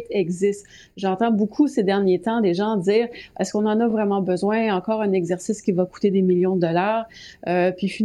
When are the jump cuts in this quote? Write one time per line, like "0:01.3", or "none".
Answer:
none

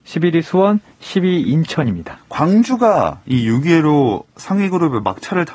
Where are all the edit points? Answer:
0:02.2

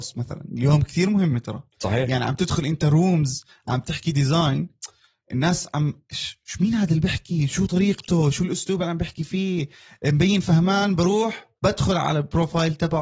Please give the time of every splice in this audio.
0:11.6

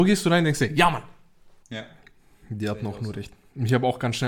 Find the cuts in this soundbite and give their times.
0:01.6

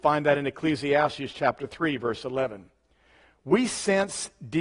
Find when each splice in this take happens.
none

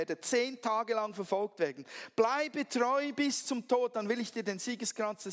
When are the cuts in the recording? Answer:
none

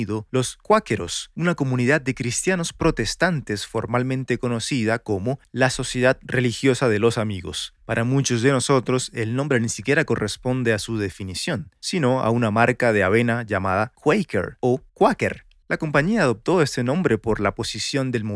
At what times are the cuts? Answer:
0:07.8

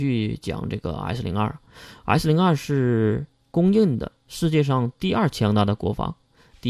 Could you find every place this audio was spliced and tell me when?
none

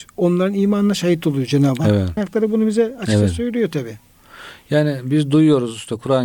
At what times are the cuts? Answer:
0:02.2

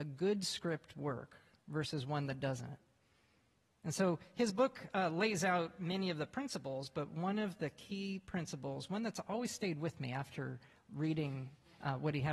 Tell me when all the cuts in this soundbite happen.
none

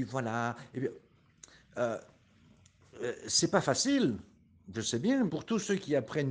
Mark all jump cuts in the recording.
0:05.3

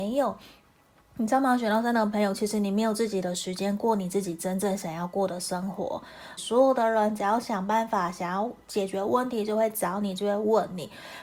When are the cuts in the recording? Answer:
0:06.4

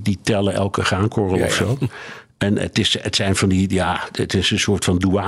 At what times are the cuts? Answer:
none

